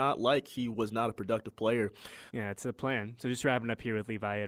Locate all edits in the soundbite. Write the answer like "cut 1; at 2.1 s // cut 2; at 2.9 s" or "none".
cut 1; at 2.3 s